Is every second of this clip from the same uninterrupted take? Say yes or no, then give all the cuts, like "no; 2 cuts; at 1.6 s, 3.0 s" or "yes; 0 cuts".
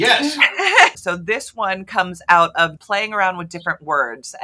no; 2 cuts; at 0.9 s, 2.8 s